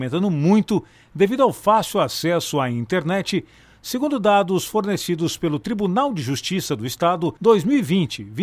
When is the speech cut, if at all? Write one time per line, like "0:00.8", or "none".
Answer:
0:07.4